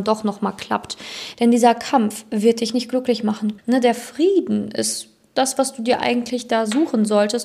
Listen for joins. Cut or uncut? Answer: cut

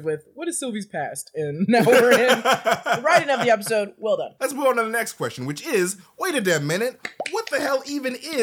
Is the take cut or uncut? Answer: uncut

